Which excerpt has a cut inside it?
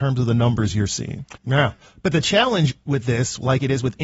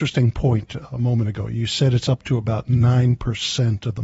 first; 1 cut; at 1.3 s

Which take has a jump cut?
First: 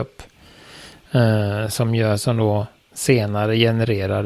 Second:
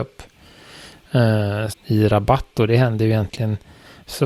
second; 1 cut; at 1.7 s

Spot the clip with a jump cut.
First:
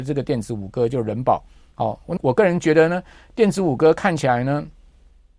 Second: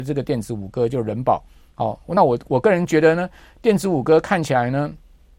first; 1 cut; at 2.2 s

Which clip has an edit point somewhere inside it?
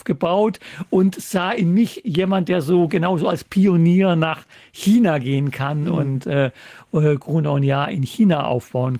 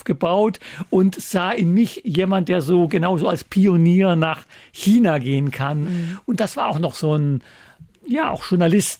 second; 1 cut; at 5.8 s

